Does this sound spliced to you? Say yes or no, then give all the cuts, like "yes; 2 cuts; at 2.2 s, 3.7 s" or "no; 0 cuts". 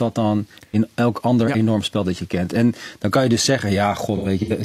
no; 0 cuts